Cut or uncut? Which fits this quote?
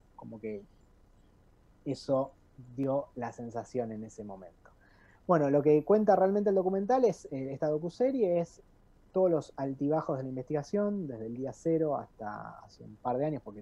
uncut